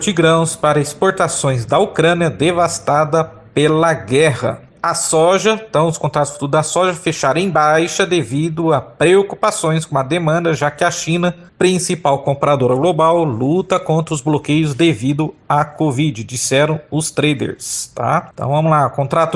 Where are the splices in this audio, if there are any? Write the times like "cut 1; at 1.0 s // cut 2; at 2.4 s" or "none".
none